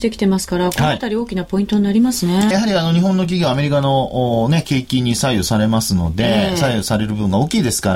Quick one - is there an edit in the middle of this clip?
yes; 1 cut; at 2.5 s

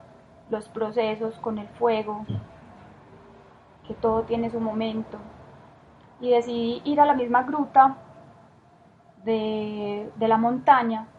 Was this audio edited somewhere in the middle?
no; 0 cuts

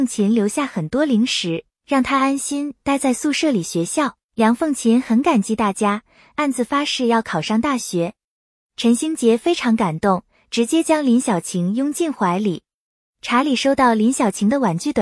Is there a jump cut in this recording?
yes; 2 cuts; at 4.2 s, 8.6 s

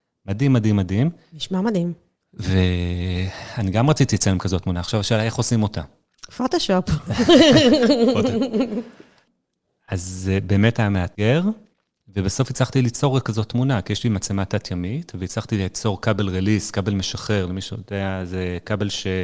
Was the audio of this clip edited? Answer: no; 0 cuts

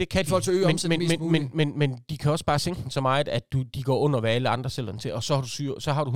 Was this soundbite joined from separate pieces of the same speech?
no; 0 cuts

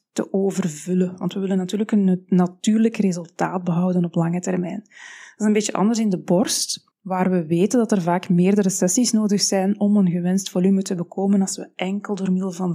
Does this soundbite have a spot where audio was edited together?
yes; 1 cut; at 6.9 s

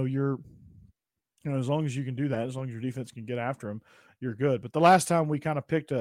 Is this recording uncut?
yes; 0 cuts

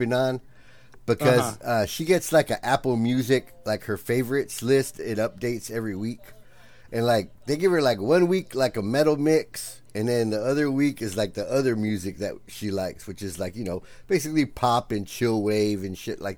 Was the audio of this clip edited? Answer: no; 0 cuts

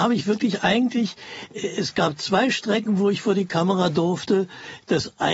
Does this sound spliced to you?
no; 0 cuts

